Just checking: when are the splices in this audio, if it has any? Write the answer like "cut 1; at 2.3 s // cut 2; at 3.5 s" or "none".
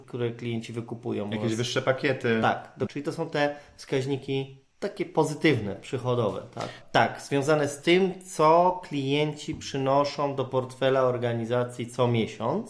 cut 1; at 2.9 s // cut 2; at 4.7 s // cut 3; at 6.8 s